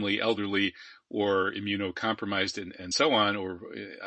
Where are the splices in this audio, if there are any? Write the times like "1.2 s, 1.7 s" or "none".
none